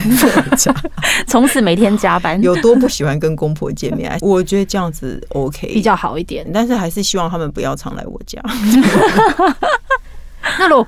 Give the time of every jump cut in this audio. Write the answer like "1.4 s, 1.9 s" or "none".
4.2 s, 6.5 s